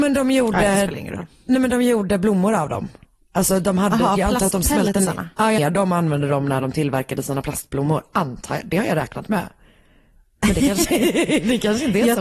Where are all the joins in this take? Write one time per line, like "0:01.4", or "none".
0:05.6